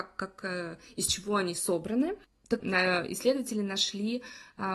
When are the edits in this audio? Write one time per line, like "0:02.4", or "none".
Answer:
0:02.6

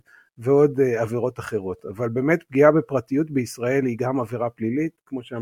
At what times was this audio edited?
none

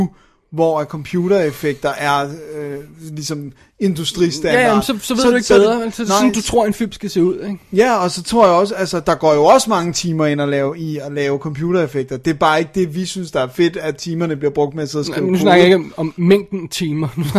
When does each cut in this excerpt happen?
none

